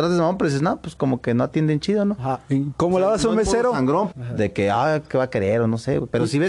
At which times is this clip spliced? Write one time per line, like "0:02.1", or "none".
0:04.1